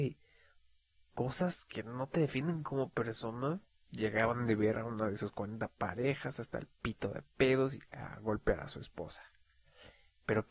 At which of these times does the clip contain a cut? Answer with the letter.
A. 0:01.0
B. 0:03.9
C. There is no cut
B